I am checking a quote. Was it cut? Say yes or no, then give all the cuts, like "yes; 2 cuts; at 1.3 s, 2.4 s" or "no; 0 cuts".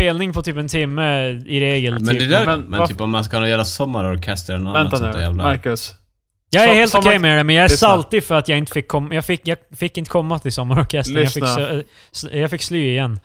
yes; 1 cut; at 2.4 s